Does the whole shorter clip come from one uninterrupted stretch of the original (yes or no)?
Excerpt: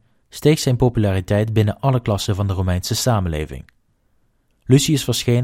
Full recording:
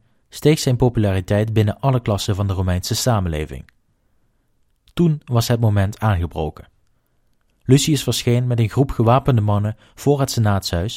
no